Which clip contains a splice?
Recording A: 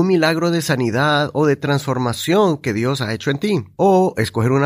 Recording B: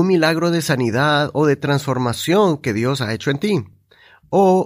A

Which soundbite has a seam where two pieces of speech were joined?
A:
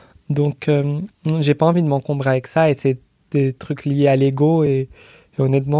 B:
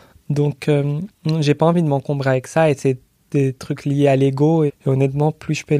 B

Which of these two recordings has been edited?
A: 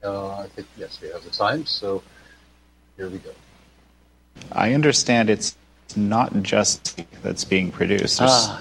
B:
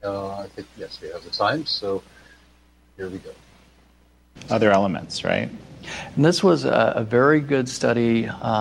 B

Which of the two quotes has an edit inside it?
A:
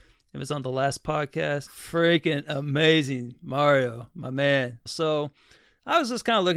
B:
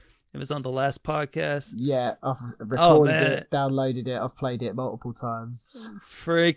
A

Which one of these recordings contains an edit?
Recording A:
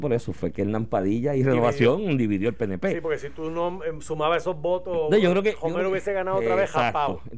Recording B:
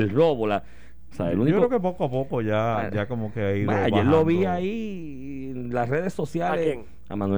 B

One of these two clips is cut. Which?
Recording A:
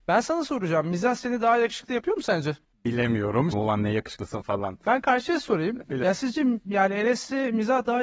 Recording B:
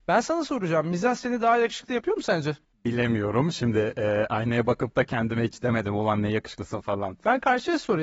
A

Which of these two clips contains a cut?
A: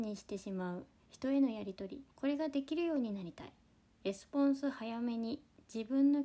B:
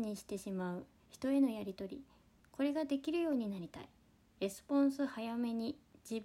A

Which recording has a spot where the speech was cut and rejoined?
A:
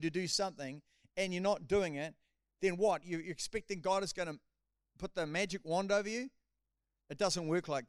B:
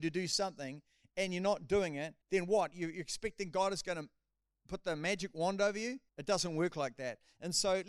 B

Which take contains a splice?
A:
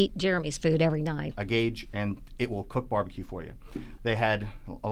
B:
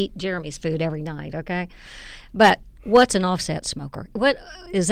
A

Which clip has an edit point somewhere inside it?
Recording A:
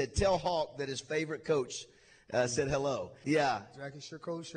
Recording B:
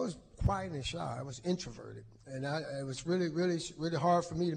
A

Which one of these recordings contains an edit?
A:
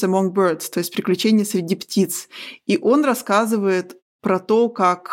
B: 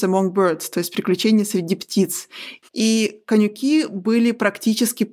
B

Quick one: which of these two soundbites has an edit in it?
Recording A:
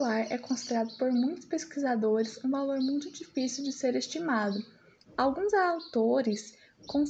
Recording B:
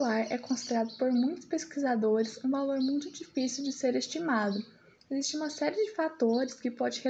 A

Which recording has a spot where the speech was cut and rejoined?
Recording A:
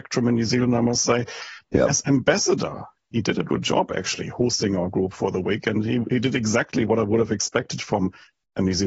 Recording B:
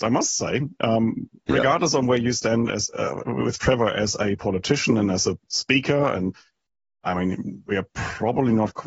A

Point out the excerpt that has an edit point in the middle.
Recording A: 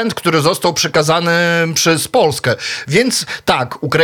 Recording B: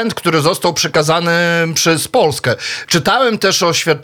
B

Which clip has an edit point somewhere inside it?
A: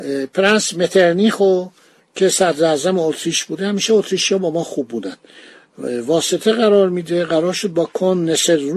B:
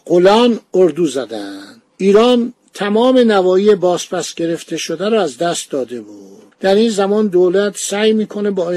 B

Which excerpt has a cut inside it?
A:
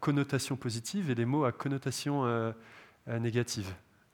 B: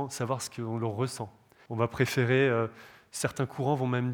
B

